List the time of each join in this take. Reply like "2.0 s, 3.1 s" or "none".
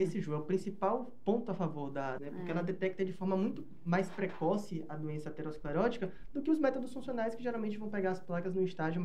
2.2 s